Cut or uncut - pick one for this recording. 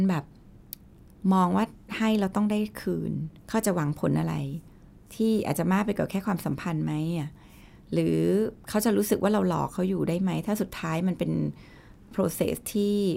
cut